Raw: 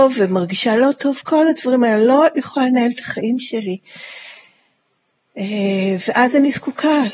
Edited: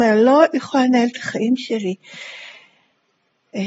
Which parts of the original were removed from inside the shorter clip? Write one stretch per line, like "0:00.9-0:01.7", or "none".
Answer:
none